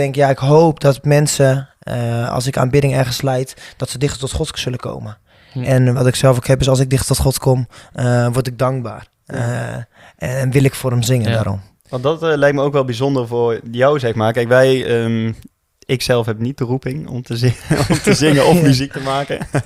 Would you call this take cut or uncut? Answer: uncut